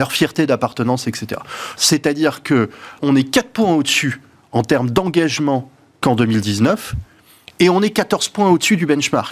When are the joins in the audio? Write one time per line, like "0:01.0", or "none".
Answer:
0:01.8
0:03.0